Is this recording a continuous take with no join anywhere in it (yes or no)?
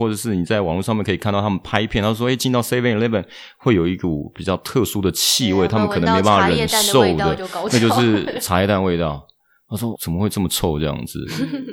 no